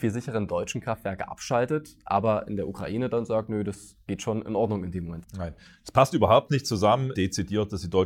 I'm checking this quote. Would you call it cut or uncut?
cut